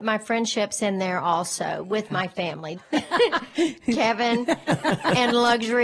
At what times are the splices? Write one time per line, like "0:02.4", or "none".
0:02.7